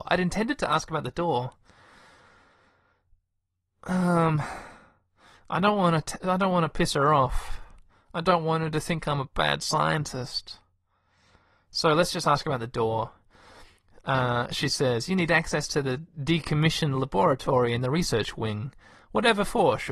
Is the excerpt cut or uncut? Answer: uncut